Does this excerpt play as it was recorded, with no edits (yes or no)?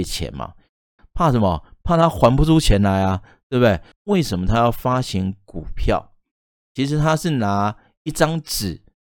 no